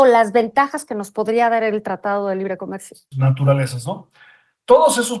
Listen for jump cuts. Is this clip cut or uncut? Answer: cut